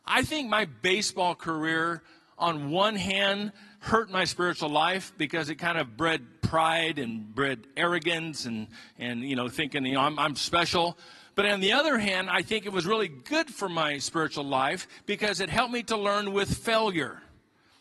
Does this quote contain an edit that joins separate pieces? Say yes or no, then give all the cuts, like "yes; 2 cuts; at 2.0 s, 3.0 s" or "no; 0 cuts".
no; 0 cuts